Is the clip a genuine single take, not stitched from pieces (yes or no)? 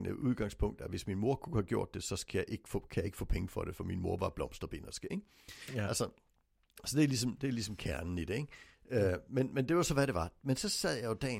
yes